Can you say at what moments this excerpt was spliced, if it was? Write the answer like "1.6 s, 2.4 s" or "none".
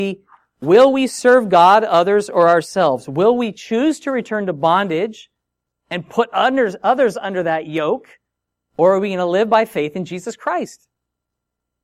none